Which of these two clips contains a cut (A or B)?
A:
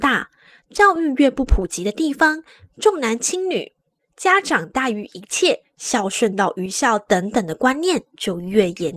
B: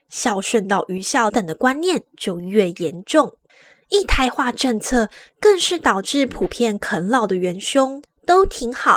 B